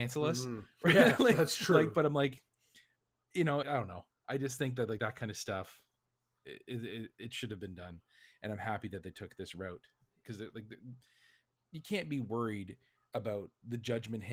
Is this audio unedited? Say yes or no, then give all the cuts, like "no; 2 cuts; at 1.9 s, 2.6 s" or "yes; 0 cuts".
no; 1 cut; at 3.6 s